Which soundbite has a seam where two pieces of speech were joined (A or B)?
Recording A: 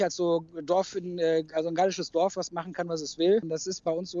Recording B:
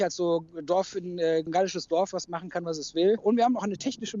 B